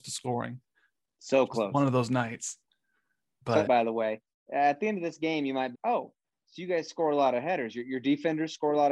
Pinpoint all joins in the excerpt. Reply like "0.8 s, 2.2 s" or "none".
3.7 s, 5.7 s